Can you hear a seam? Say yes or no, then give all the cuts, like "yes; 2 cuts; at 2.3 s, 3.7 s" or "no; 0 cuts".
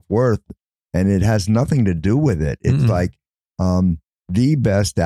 no; 0 cuts